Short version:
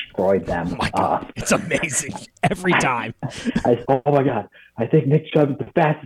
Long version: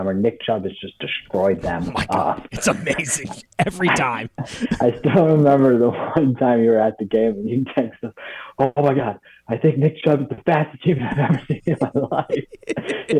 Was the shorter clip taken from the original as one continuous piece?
no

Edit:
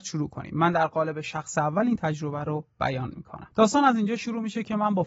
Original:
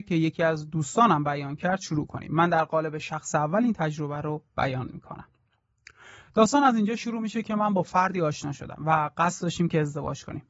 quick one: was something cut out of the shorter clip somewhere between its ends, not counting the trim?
yes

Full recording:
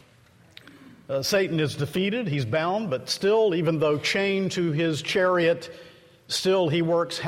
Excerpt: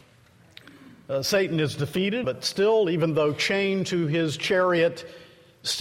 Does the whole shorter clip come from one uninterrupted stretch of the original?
no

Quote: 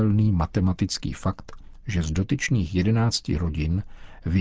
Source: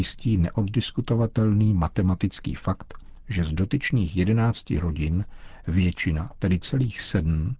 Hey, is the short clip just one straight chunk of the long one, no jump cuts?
yes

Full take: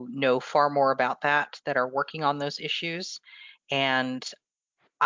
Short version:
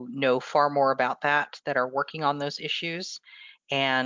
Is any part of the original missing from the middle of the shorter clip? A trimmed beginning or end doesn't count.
no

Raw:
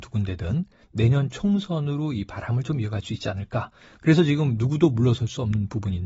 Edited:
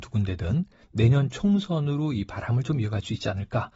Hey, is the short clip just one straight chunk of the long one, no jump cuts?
yes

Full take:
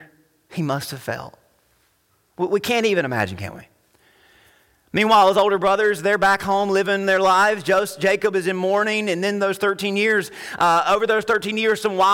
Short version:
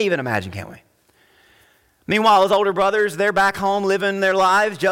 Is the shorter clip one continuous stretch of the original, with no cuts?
yes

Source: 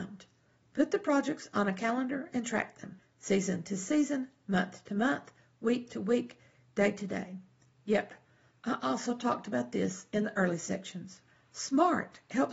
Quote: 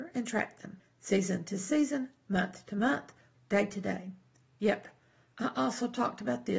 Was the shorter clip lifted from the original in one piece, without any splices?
no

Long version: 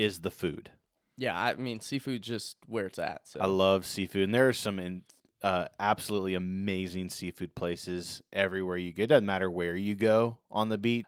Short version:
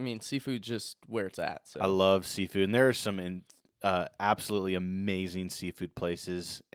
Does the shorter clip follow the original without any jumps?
yes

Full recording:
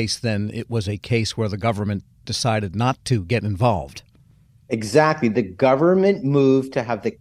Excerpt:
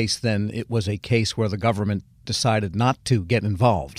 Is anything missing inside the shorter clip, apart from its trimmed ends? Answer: no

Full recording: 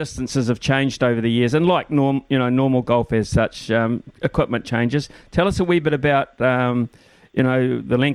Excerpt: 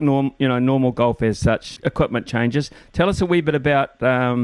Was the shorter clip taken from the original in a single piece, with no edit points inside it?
no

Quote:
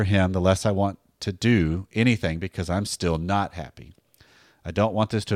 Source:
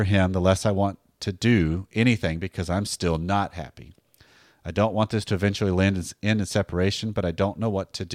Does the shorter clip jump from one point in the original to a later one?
no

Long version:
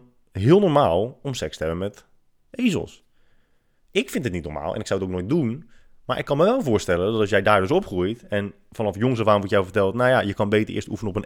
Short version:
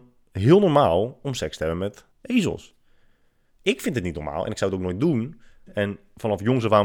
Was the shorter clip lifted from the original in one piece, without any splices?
no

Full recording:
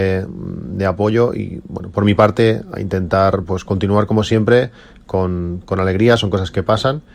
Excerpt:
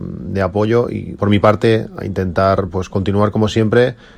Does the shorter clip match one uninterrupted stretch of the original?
no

